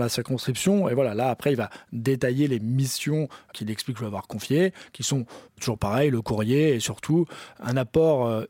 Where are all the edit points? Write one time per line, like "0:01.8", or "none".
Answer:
0:05.5